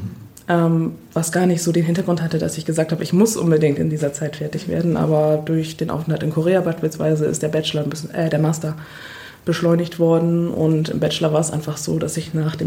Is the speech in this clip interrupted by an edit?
no; 0 cuts

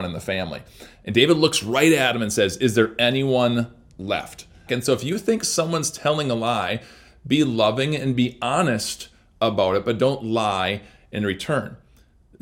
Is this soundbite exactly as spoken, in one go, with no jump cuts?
no; 1 cut; at 4.7 s

